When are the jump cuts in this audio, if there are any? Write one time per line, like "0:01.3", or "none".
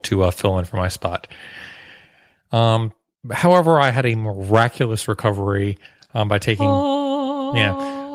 none